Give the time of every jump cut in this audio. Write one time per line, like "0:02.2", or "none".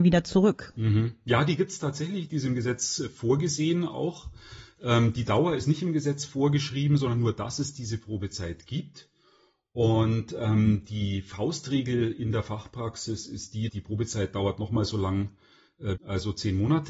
0:13.7
0:16.0